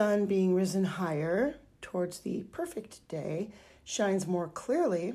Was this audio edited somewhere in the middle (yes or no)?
no